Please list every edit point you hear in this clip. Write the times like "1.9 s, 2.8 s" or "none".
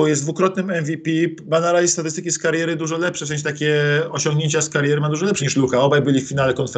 5.4 s